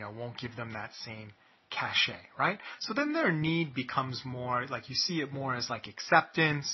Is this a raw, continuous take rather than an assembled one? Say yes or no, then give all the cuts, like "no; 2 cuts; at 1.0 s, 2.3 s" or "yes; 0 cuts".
yes; 0 cuts